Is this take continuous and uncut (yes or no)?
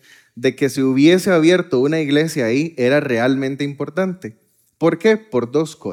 yes